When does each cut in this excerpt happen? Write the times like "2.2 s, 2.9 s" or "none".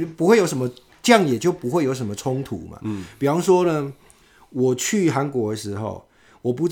none